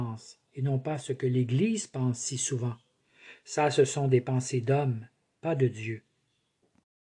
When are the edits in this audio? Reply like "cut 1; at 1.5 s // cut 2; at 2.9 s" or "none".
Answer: none